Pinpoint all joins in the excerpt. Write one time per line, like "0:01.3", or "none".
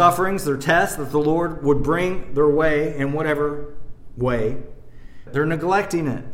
0:05.3

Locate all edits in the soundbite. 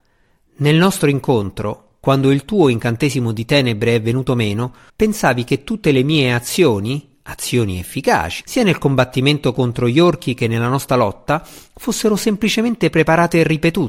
0:04.9
0:08.4

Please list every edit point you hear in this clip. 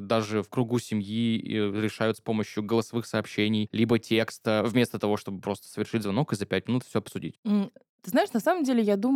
none

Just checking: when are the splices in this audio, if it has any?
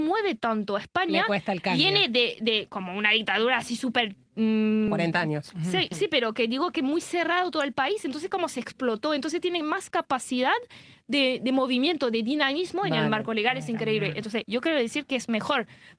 0:04.9

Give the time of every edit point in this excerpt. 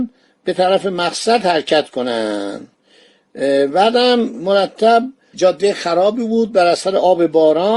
0:05.3

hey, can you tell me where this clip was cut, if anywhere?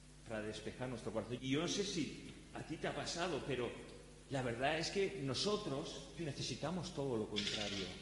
0:01.4
0:06.2

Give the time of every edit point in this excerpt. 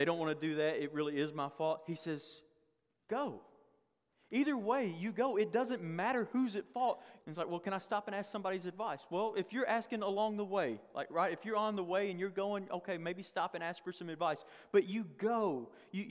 0:07.2

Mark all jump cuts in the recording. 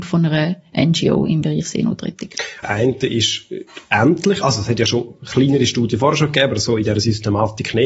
0:02.6

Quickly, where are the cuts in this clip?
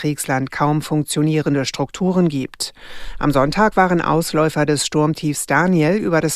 none

